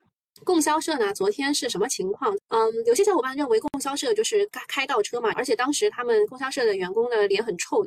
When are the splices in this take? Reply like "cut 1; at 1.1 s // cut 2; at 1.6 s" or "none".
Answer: cut 1; at 2.4 s // cut 2; at 5.3 s